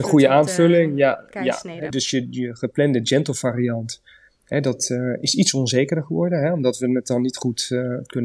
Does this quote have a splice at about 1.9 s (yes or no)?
yes